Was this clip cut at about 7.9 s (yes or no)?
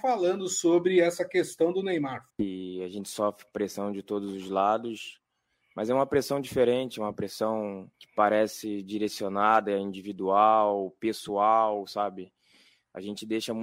yes